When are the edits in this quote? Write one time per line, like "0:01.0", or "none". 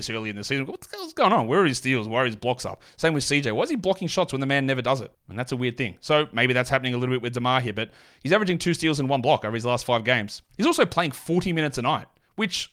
0:05.1